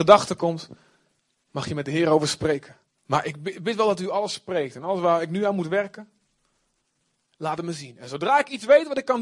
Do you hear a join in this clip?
yes; 1 cut; at 3.0 s

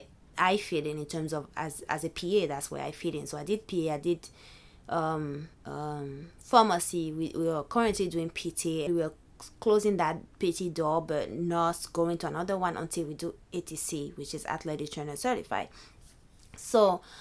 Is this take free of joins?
no; 2 cuts; at 5.5 s, 8.9 s

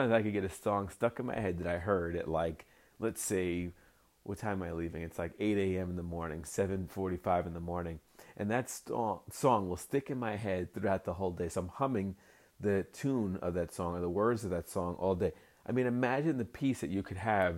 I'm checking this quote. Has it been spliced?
no; 0 cuts

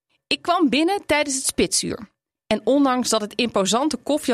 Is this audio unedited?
yes; 0 cuts

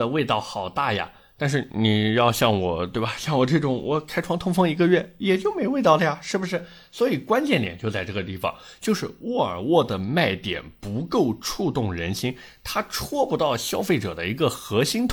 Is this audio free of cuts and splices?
yes; 0 cuts

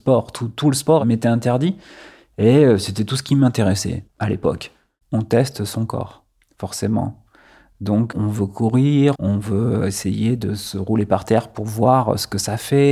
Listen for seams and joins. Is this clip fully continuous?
no; 2 cuts; at 5.0 s, 9.1 s

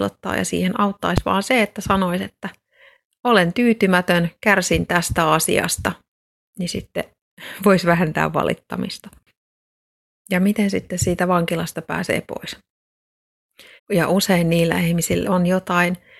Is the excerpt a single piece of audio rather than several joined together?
no; 2 cuts; at 13.8 s, 15.2 s

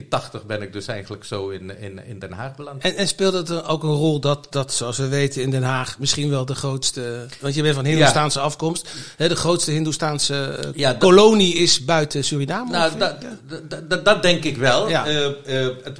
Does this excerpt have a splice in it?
no; 0 cuts

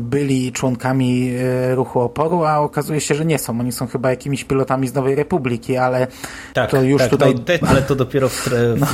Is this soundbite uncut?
no; 1 cut; at 7.6 s

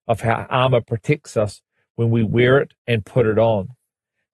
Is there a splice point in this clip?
no; 0 cuts

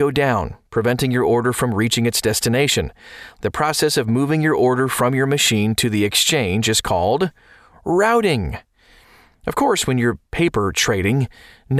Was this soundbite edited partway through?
yes; 1 cut; at 3.3 s

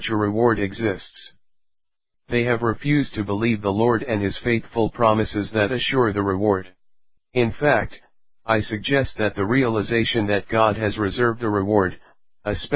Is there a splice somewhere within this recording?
yes; 2 cuts; at 2.1 s, 7.2 s

